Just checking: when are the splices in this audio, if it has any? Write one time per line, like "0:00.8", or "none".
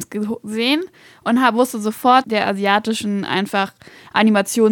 0:02.2